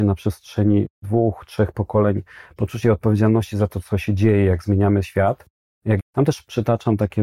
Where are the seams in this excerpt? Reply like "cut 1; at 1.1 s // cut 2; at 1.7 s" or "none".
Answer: cut 1; at 6.0 s